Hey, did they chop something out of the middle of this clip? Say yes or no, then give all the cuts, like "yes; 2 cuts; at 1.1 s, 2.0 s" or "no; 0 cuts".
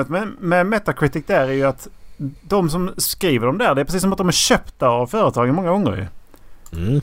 no; 0 cuts